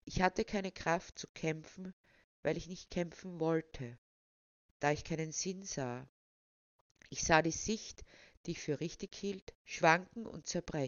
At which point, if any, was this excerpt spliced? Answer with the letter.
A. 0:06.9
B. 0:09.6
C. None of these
B